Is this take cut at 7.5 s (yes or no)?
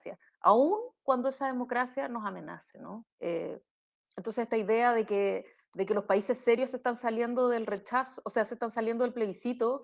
no